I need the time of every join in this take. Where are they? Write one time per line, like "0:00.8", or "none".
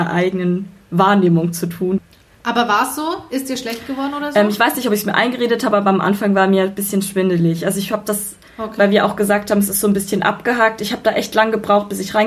none